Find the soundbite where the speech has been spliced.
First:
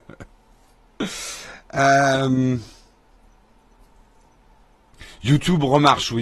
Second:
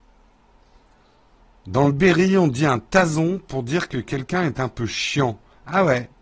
first; 1 cut; at 3.8 s

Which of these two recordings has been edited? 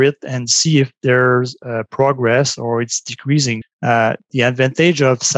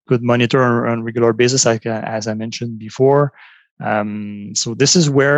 first; 1 cut; at 3.6 s

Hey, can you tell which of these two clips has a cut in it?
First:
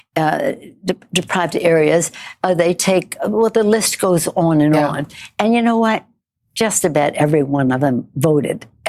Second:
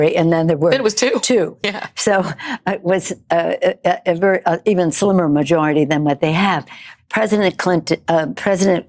second; 1 cut; at 7.0 s

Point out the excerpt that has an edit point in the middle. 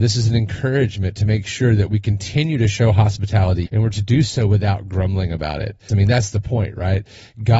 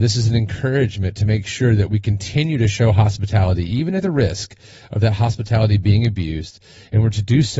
first; 2 cuts; at 3.7 s, 5.9 s

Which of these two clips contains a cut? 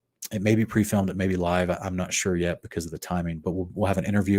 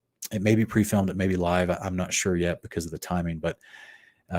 first; 1 cut; at 3.4 s

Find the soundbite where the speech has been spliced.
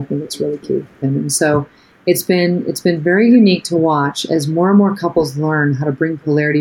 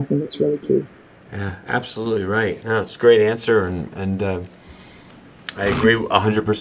first; 1 cut; at 1.0 s

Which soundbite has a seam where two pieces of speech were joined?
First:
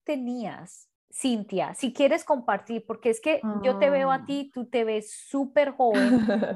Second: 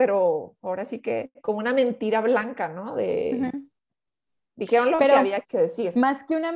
second; 2 cuts; at 1.4 s, 5.4 s

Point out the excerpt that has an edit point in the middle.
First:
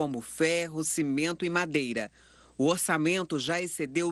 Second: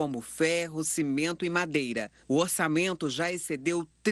second; 1 cut; at 2.2 s

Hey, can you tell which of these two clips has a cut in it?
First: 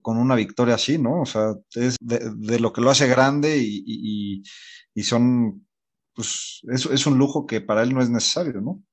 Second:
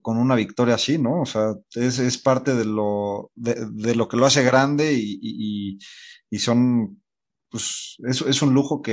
first; 1 cut; at 2.0 s

